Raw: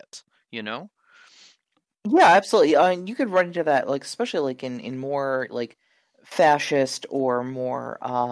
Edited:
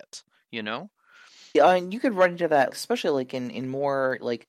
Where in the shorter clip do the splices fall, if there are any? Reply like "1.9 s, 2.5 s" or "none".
1.5 s, 2.7 s